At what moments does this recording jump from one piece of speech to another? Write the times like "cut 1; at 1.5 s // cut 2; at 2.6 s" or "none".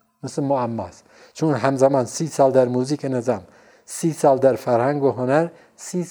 none